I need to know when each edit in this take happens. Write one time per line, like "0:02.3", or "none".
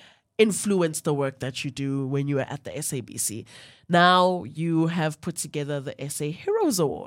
none